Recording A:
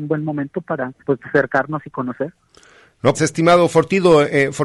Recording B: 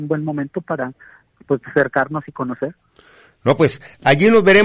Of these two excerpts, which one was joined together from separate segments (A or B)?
A